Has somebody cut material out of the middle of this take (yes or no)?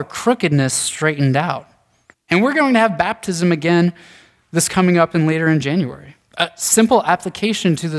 yes